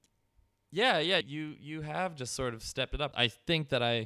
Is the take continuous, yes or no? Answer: no